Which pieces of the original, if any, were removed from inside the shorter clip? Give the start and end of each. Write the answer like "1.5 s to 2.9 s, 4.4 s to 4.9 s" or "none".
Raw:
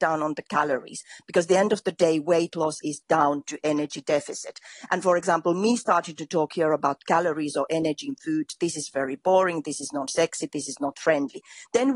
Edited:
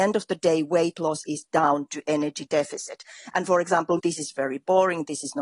5.5 s to 8.6 s